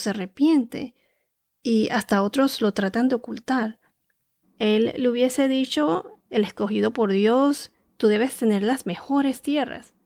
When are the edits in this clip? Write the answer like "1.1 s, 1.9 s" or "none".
4.4 s, 6.2 s